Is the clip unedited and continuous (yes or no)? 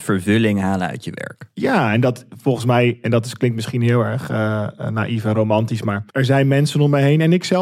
no